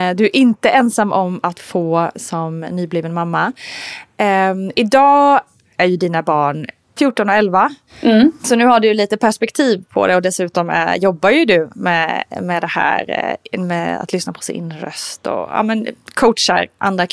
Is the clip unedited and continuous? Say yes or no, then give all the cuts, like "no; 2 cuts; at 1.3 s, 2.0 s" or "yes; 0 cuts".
yes; 0 cuts